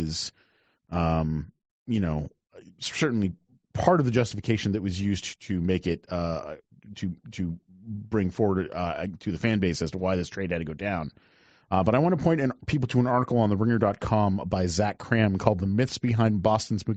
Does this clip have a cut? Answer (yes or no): no